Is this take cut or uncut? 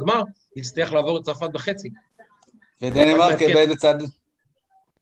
uncut